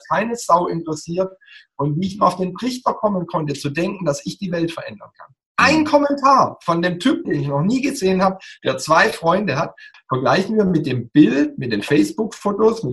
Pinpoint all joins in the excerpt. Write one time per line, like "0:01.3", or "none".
0:07.2
0:09.9